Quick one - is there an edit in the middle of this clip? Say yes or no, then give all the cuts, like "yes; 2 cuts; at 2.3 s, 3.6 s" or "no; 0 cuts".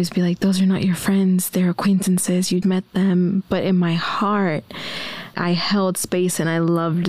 yes; 2 cuts; at 2.6 s, 5.3 s